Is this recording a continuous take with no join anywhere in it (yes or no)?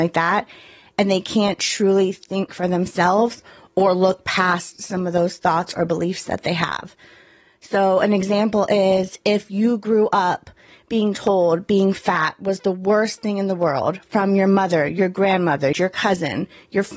no